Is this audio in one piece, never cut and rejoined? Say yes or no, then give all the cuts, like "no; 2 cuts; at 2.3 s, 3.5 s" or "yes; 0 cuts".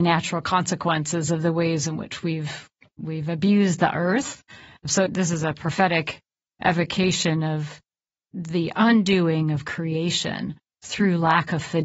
yes; 0 cuts